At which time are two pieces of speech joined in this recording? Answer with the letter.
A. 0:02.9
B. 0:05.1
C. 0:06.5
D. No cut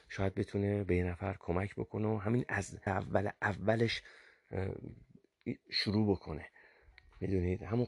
A